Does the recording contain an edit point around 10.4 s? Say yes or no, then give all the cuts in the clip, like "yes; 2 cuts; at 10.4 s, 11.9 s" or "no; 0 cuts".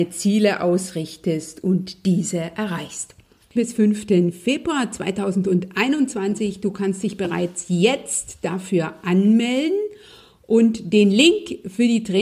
no; 1 cut; at 3.6 s